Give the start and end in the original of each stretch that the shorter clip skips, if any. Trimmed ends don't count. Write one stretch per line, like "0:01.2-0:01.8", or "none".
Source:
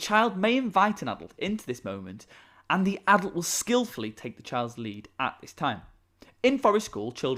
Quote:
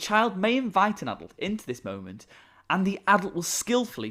none